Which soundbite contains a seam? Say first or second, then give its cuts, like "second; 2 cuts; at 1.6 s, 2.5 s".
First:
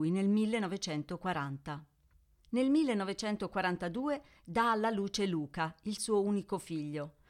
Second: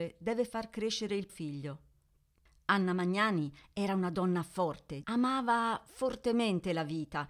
second; 2 cuts; at 1.3 s, 5.0 s